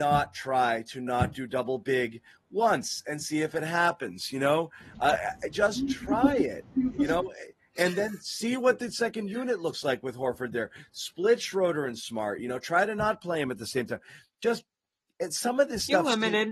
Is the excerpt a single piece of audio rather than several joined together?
yes; 0 cuts

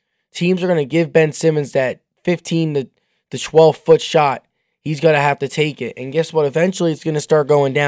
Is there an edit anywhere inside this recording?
no; 0 cuts

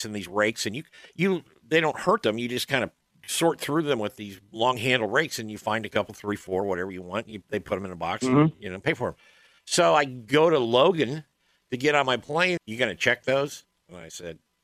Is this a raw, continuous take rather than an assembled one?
no; 1 cut; at 12.6 s

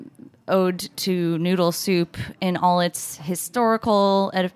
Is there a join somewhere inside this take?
no; 0 cuts

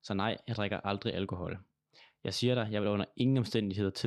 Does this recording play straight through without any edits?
yes; 0 cuts

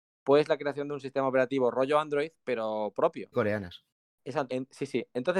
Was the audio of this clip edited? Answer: yes; 2 cuts; at 3.3 s, 4.5 s

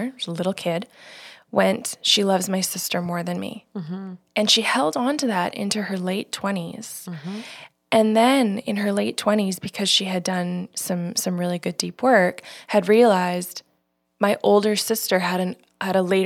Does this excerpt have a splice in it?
no; 0 cuts

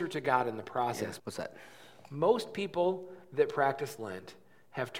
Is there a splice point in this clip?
yes; 1 cut; at 1.2 s

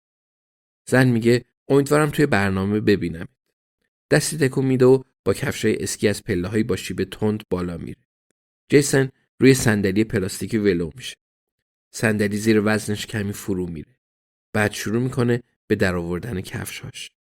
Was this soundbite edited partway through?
no; 0 cuts

